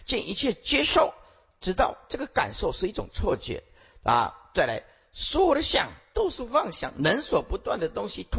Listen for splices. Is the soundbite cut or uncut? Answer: uncut